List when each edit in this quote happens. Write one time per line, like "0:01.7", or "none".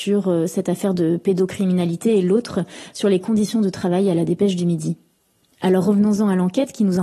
none